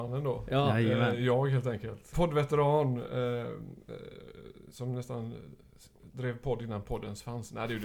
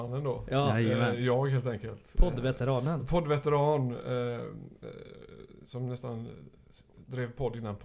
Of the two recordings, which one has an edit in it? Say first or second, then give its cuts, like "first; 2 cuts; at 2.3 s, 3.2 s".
first; 1 cut; at 2.1 s